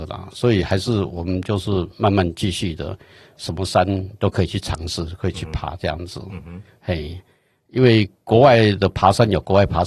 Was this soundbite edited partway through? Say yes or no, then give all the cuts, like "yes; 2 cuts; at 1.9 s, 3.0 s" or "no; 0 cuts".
no; 0 cuts